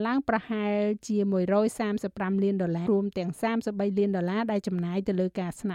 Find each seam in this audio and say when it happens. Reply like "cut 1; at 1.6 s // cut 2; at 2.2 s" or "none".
cut 1; at 2.9 s